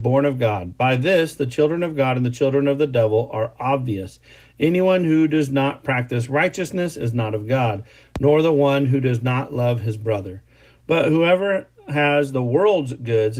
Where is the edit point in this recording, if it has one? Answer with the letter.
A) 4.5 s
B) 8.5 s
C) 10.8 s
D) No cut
C